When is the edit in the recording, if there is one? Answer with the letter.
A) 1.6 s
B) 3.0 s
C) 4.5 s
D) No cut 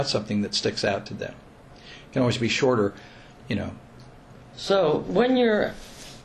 C